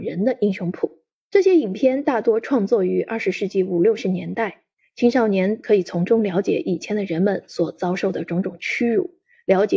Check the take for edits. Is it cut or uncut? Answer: cut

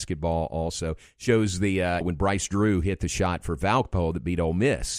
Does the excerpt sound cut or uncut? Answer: cut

